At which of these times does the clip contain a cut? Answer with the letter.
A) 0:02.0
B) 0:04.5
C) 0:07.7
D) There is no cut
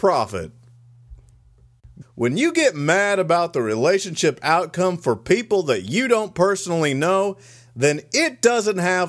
A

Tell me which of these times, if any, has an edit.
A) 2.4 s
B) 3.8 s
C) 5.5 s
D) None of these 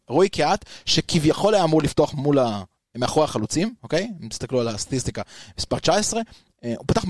B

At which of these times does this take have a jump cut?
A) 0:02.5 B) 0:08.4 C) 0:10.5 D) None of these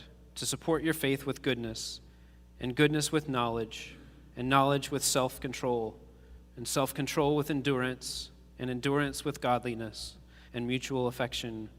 C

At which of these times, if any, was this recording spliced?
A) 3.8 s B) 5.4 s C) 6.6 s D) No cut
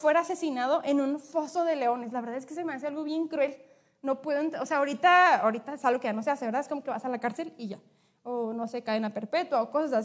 D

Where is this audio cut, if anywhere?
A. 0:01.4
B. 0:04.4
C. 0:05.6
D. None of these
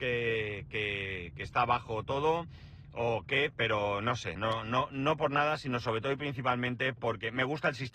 B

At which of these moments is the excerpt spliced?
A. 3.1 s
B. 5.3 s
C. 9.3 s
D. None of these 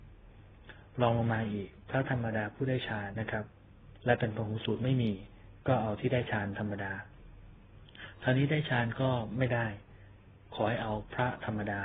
A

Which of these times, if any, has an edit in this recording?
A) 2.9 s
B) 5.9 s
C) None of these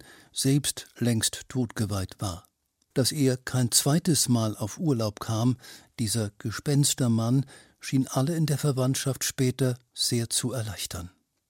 A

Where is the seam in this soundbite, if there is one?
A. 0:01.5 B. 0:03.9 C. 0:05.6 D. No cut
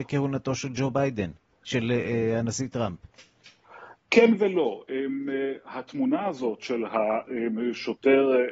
D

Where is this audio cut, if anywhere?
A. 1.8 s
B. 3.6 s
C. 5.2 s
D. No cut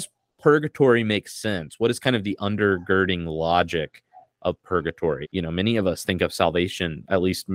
C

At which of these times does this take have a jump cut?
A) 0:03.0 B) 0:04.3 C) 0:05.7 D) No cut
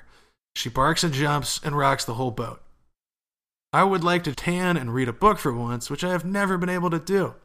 B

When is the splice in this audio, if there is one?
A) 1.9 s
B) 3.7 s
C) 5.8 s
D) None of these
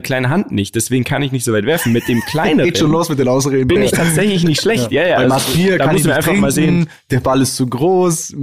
D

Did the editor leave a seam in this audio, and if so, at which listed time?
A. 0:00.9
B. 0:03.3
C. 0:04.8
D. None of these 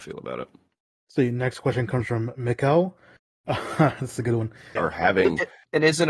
C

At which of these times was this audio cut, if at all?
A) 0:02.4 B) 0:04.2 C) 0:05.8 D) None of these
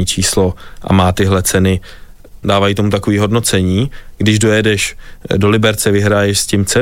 A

